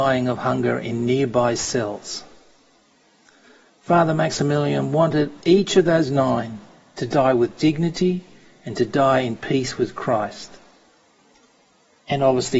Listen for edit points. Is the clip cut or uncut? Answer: cut